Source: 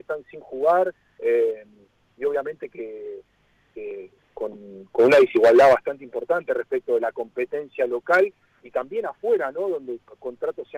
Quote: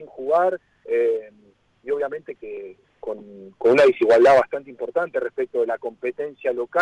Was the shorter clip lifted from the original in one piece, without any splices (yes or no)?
no